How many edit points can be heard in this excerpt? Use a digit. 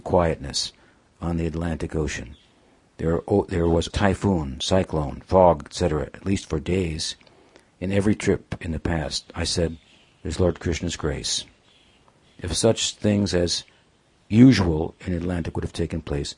1